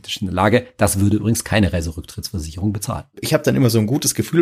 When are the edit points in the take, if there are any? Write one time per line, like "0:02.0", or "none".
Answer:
0:03.1